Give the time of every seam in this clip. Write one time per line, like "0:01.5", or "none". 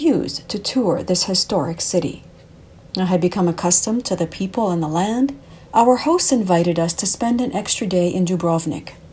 0:02.8
0:05.7